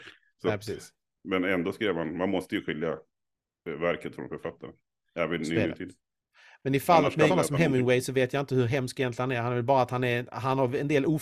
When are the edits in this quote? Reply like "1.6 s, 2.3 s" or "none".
7.3 s